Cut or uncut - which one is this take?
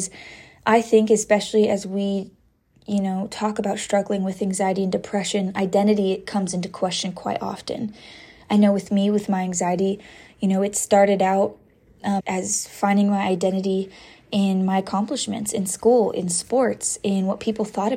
cut